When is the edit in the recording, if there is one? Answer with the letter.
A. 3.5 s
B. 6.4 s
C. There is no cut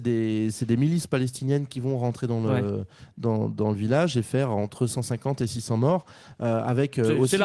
C